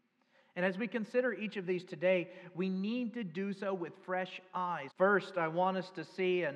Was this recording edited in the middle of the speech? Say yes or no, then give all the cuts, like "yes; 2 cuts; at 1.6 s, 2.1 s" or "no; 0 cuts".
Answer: yes; 1 cut; at 4.9 s